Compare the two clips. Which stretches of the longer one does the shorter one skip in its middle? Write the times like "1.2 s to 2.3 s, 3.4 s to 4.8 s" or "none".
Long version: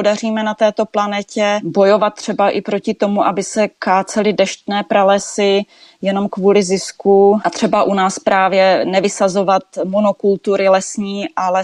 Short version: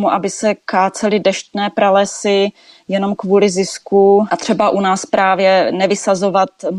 none